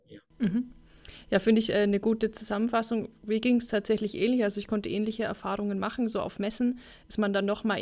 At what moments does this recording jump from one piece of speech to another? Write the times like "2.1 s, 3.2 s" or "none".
none